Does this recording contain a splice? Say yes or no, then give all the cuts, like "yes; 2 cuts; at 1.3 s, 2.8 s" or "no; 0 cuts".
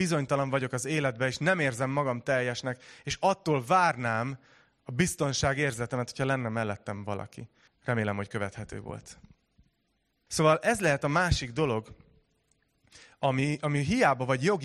yes; 2 cuts; at 7.7 s, 10.3 s